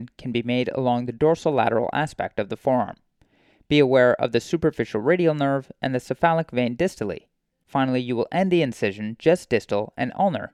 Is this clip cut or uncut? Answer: uncut